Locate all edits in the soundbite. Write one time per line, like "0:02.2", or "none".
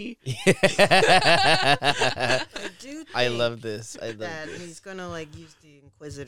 none

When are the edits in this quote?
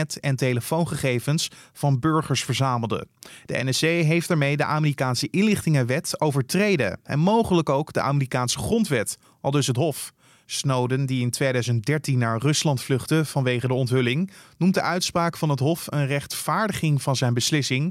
none

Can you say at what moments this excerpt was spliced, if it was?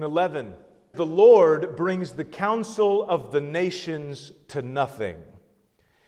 0:00.9

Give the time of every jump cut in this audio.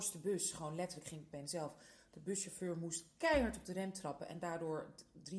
0:01.3

